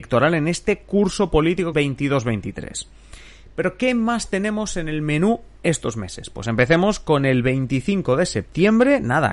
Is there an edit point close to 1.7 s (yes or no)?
yes